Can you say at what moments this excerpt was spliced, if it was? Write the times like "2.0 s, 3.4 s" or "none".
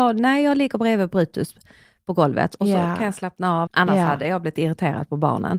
3.7 s